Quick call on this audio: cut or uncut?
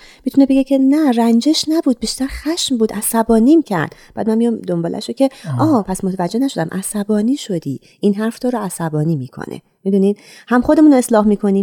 uncut